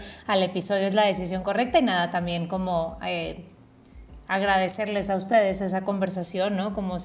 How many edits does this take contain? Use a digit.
0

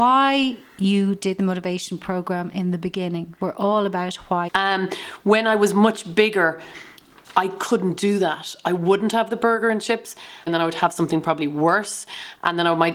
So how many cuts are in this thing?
2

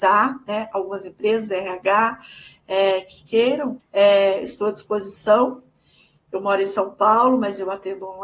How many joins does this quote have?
1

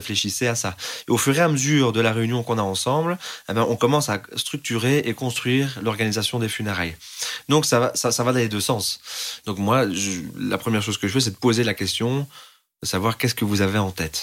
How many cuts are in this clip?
1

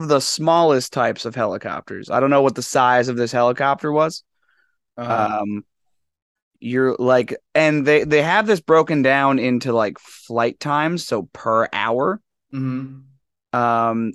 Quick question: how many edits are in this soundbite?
1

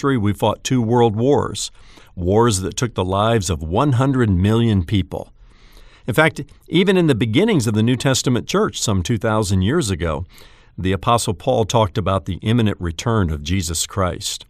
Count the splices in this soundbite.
0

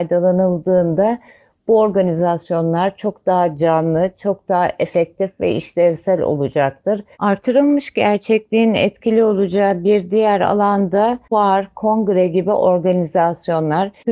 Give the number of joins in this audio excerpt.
1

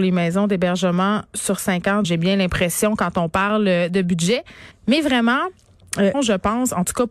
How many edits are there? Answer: 3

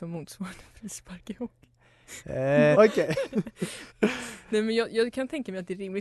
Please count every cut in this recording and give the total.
2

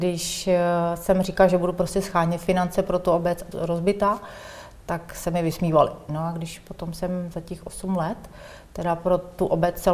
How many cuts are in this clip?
2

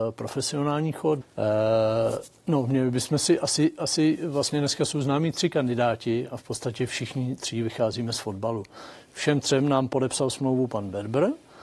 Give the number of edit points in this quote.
1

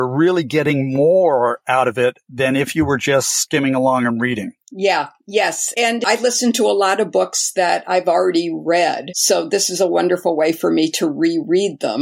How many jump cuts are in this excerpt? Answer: 0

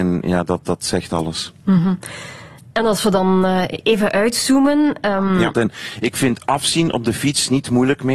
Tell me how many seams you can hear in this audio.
1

